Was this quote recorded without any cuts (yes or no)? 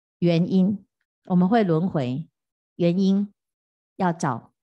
no